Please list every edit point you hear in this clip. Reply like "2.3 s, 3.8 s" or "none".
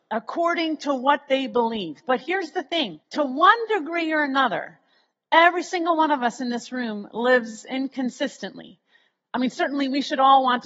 3.0 s